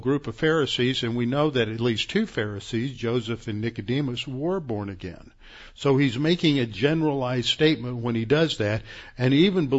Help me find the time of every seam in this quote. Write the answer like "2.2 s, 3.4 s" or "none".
none

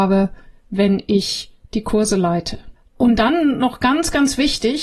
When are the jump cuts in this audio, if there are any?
none

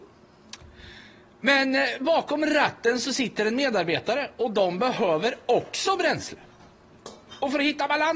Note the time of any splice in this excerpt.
none

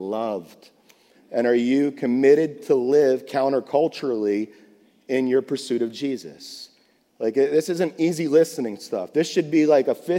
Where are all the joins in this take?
1.1 s, 7.1 s

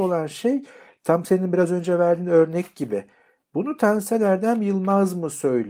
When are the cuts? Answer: none

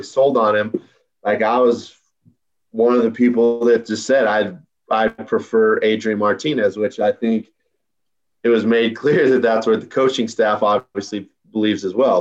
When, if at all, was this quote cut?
none

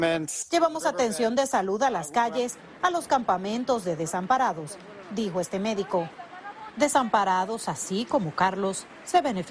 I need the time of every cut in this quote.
none

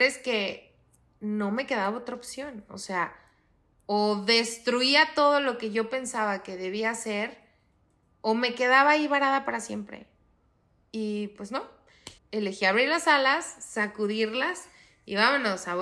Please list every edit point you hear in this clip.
12.2 s

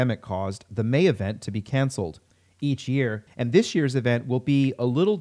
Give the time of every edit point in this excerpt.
3.3 s

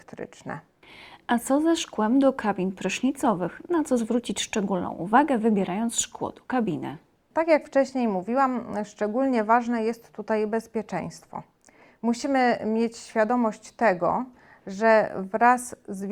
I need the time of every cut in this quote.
none

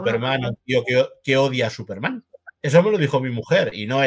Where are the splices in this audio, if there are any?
none

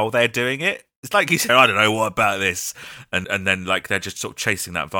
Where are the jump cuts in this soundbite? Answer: 1.5 s, 3.2 s

